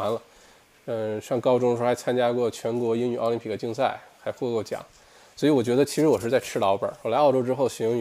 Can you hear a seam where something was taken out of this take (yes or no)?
no